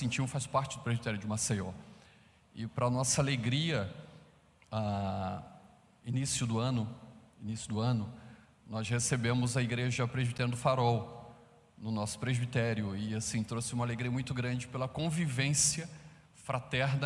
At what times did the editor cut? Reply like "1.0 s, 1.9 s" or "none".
none